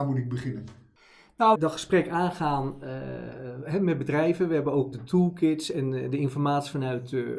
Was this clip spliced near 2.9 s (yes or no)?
no